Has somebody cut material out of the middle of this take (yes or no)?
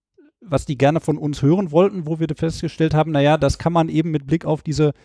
no